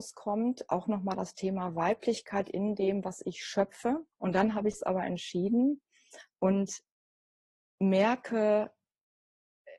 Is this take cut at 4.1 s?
yes; 1 cut; at 4.1 s

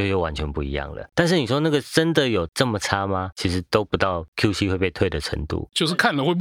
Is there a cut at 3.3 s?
no; 1 cut; at 1.1 s

